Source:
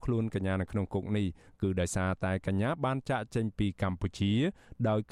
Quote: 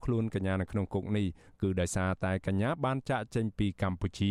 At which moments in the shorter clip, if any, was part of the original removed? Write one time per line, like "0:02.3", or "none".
none